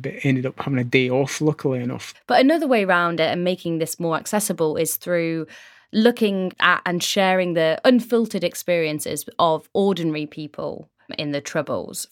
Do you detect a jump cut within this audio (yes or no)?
yes